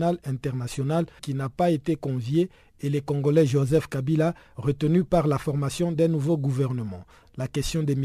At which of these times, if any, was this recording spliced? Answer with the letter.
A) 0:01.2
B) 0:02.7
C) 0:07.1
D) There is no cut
A